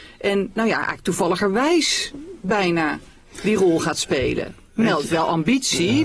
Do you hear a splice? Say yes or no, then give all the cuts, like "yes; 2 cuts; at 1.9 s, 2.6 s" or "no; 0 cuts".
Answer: no; 0 cuts